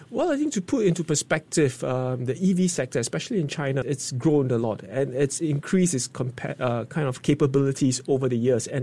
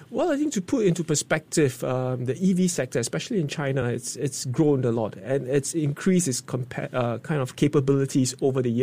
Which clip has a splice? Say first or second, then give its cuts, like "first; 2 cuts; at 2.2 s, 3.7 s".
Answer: first; 1 cut; at 3.8 s